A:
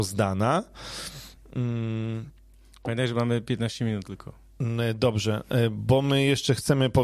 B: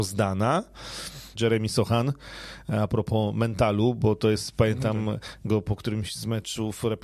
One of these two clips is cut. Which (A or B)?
B